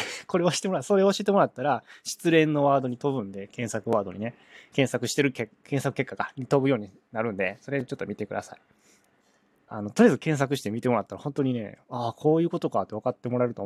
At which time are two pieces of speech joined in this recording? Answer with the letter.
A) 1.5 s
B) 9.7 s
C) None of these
B